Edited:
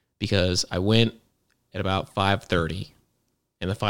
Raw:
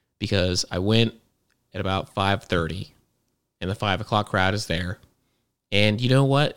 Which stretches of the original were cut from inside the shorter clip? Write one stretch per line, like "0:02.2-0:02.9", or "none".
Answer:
none